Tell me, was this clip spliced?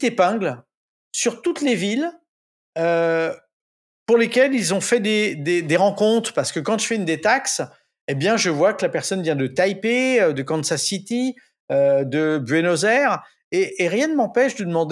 no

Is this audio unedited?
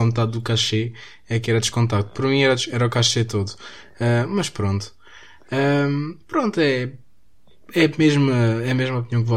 yes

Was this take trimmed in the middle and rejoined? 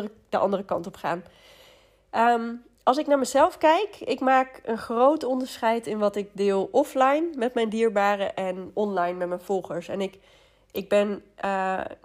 no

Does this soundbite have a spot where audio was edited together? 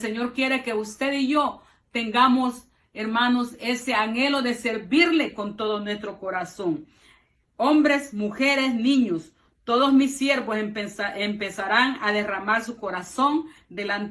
no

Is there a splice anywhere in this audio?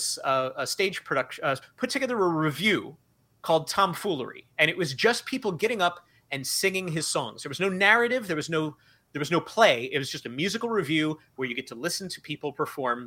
yes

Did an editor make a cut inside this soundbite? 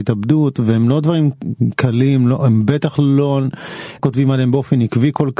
yes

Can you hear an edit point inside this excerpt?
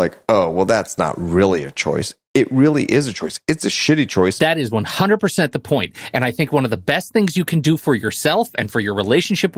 yes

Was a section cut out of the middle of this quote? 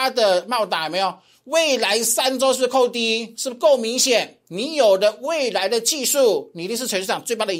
no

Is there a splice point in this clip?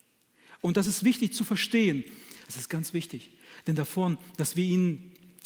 yes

